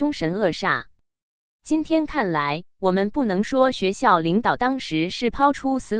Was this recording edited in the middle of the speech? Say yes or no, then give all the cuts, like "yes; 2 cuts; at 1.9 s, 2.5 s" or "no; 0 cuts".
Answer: no; 0 cuts